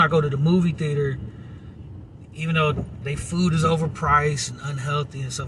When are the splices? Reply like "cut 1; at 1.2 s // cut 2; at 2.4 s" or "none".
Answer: none